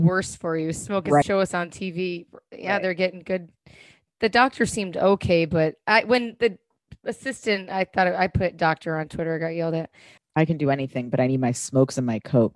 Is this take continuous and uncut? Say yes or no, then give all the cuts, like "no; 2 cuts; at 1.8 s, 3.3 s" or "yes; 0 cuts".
no; 2 cuts; at 1.2 s, 10.2 s